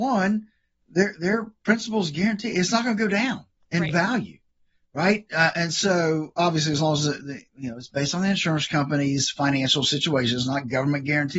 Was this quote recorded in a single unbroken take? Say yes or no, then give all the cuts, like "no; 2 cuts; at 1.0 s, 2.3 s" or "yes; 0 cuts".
yes; 0 cuts